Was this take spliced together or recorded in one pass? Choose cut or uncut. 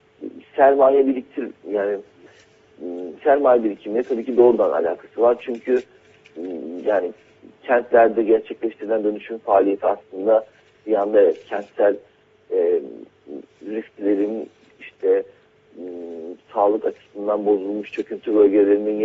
uncut